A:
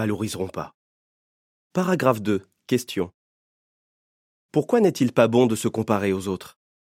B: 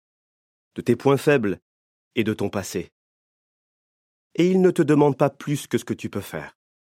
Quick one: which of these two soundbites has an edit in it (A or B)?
A